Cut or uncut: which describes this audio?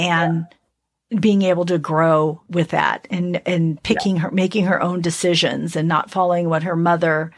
uncut